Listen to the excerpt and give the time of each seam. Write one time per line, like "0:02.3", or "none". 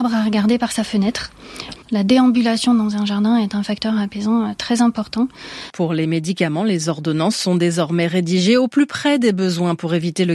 0:01.8
0:05.7

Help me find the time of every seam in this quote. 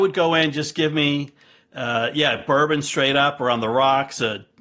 none

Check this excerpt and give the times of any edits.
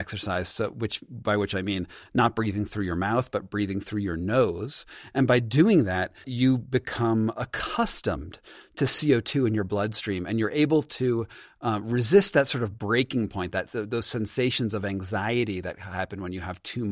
0:06.2

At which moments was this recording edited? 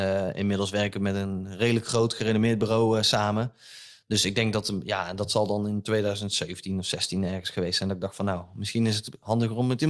none

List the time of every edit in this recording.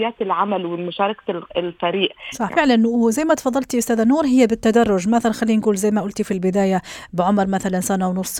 0:02.5

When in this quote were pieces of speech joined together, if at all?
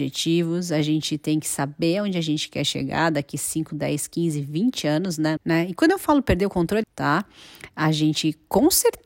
0:05.4
0:06.8

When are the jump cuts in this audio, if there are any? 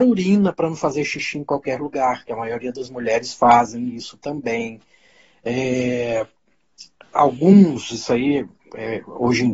none

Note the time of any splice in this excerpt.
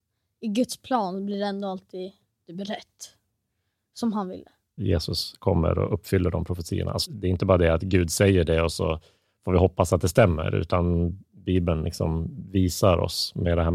0:04.8
0:07.0

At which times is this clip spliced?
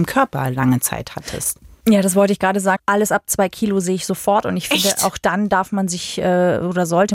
0:02.8

